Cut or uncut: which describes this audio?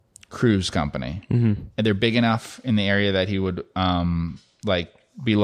uncut